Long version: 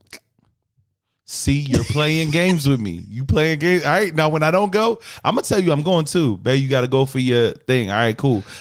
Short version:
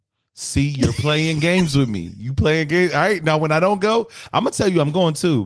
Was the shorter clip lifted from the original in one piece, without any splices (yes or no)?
yes